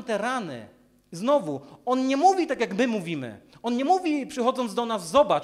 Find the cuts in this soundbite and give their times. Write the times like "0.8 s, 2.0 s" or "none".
none